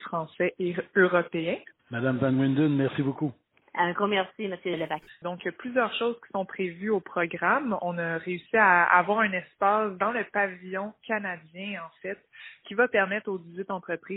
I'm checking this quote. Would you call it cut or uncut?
cut